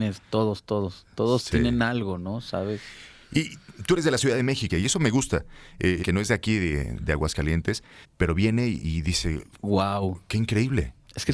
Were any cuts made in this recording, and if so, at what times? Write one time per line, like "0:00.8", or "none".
0:04.7
0:06.0
0:08.0